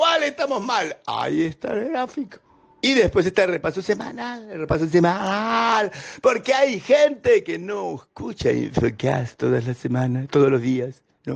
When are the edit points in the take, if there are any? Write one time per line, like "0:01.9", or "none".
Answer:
none